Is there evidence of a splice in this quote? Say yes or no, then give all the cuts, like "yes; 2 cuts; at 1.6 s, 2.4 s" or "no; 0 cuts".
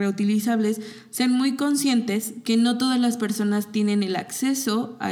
no; 0 cuts